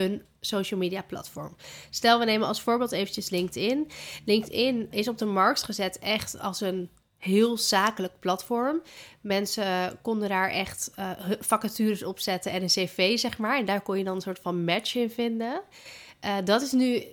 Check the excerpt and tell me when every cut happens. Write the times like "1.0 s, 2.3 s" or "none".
4.9 s